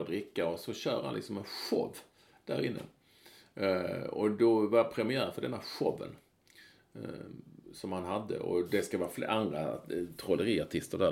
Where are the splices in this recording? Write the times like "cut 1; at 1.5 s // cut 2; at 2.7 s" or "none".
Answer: none